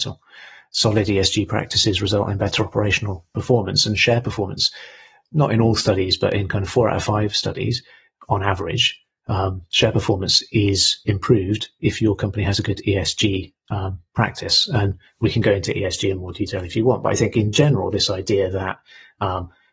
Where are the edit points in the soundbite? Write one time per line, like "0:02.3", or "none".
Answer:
none